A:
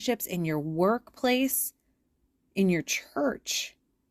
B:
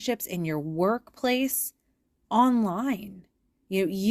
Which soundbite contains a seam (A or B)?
B